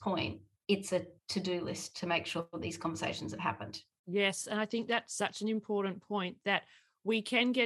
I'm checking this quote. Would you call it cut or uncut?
uncut